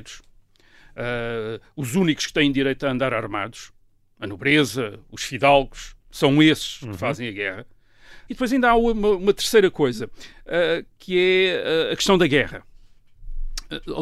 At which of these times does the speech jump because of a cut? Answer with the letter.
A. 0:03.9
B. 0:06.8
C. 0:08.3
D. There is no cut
C